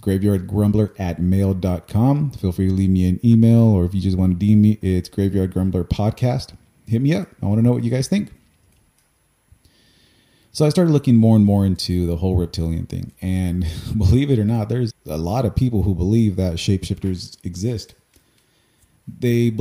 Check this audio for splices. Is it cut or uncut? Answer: cut